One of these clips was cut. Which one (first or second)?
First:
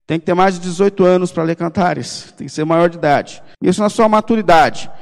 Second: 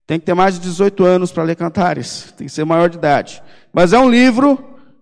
first